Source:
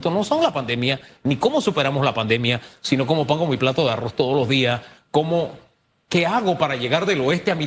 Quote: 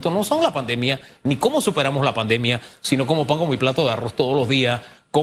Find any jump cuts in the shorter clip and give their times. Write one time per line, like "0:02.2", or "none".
none

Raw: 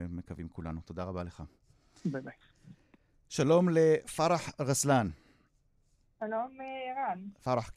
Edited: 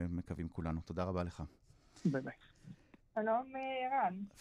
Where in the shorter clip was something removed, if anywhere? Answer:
0:03.0

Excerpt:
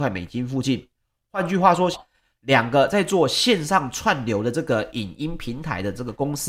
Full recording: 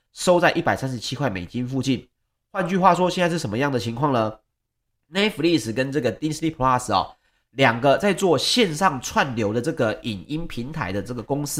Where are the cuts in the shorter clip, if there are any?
0:01.9

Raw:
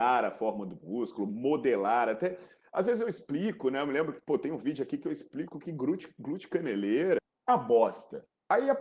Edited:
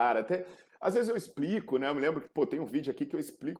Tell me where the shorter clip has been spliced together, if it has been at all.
none

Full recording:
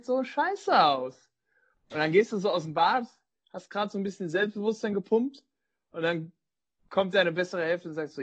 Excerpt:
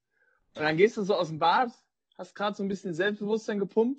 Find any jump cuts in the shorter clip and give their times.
none

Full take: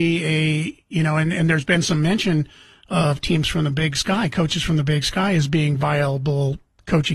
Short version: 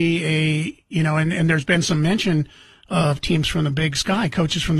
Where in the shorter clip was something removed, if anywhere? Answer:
none

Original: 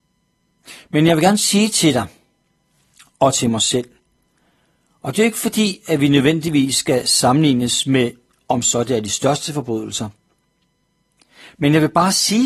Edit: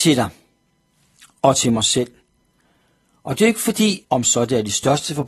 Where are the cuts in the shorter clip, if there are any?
0:04.0

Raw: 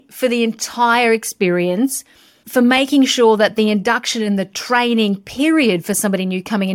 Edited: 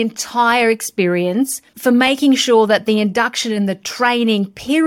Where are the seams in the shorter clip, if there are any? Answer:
0:01.7

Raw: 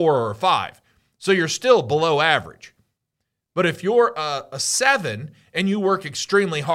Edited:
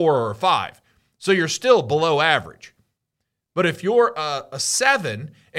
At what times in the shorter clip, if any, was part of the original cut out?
none

